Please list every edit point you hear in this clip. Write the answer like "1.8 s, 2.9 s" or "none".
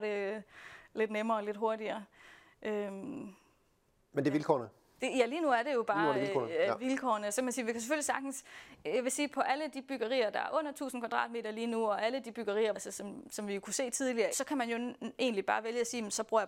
12.7 s, 14.3 s